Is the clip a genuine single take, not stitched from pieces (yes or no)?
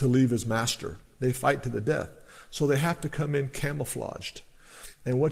yes